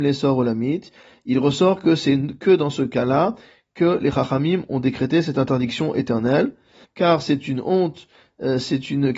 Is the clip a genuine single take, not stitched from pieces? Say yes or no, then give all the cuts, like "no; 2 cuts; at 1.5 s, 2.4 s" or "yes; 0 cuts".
no; 1 cut; at 6.8 s